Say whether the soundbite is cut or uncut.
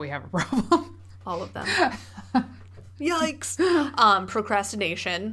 uncut